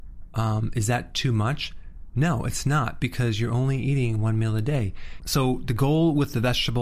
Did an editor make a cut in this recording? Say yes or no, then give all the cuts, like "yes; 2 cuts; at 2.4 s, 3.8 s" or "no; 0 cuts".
yes; 1 cut; at 5.2 s